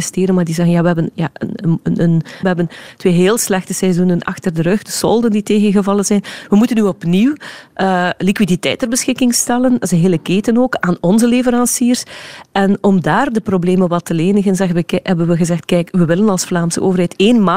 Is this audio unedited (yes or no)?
no